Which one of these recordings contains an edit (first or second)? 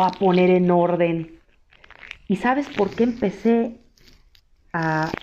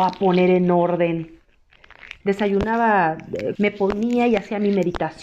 second